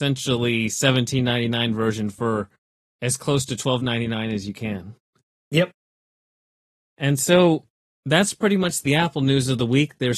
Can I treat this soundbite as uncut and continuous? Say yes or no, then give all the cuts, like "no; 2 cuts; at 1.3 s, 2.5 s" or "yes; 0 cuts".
yes; 0 cuts